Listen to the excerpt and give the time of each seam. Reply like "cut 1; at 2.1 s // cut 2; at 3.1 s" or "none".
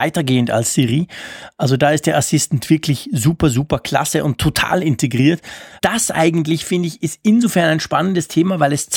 cut 1; at 5.8 s